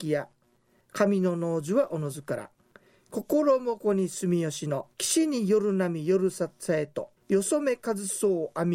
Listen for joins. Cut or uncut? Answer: cut